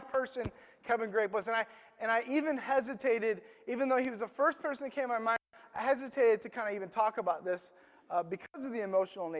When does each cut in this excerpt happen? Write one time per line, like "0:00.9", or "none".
none

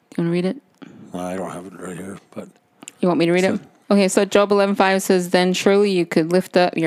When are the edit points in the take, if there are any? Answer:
0:03.8

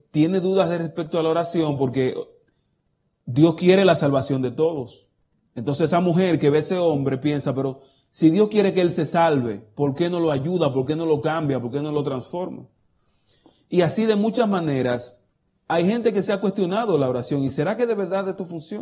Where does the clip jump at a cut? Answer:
none

